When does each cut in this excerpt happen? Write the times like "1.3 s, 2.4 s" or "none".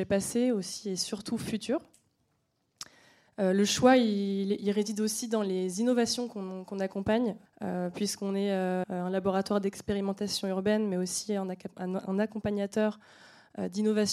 7.5 s, 8.8 s